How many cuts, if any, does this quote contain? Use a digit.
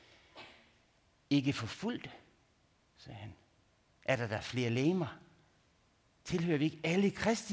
1